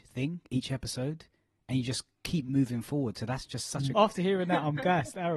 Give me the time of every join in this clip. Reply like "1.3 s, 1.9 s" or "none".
3.9 s